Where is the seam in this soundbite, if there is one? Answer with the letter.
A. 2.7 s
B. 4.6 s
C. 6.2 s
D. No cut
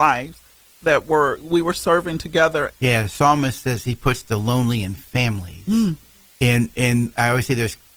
A